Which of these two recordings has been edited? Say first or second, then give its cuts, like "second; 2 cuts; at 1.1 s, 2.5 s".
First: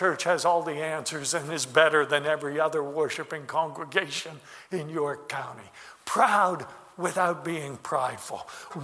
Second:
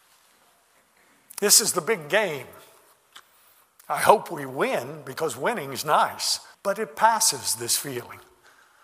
second; 1 cut; at 6.5 s